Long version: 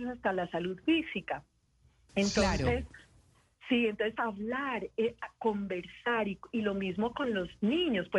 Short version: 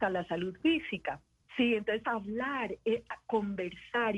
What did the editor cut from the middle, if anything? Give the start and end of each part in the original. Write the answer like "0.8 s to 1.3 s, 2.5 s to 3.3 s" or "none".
1.7 s to 3.6 s